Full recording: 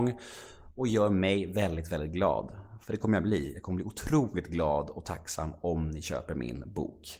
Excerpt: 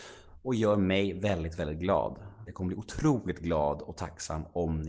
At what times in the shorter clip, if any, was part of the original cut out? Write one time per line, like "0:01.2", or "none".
0:02.5

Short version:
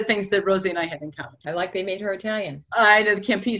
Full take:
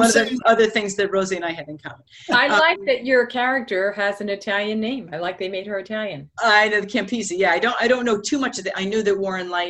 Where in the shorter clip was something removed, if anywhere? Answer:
0:01.4

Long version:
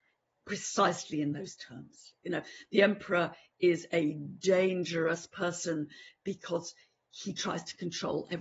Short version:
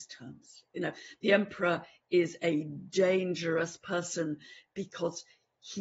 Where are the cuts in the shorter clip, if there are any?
none

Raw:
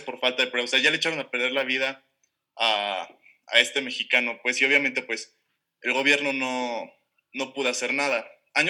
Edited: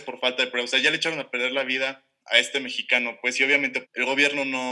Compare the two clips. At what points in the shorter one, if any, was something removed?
0:02.2
0:03.8

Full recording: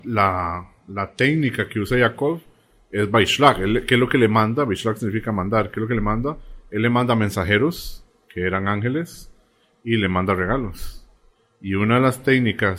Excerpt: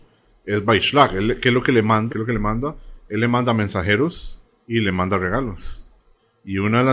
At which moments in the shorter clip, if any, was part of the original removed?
0:02.1
0:04.6

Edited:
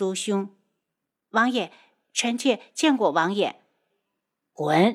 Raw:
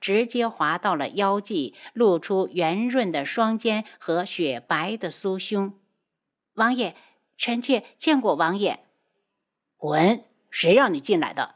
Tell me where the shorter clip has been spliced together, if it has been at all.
none

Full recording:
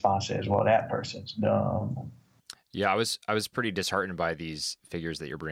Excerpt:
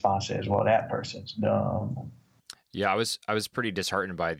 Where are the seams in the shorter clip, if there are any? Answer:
none

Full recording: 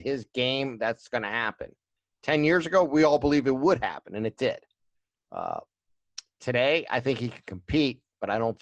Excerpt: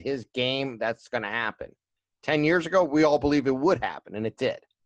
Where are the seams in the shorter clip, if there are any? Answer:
none

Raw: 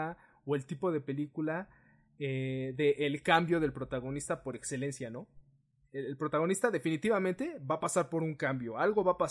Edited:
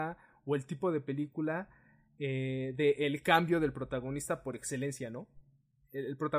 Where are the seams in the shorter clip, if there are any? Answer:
none

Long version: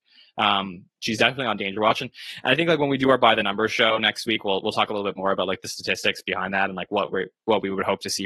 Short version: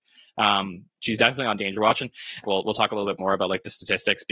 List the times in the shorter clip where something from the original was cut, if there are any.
0:02.4

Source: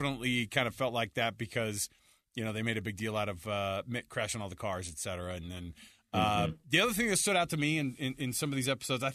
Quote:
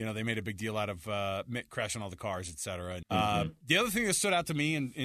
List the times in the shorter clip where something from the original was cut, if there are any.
0:03.0

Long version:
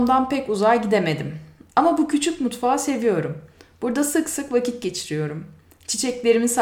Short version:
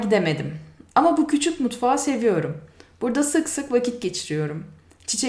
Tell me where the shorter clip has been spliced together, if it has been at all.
none

